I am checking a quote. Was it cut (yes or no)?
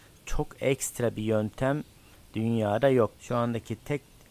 yes